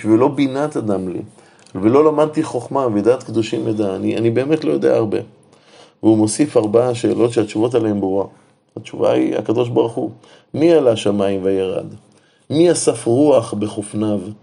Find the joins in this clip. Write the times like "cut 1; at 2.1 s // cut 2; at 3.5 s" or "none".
none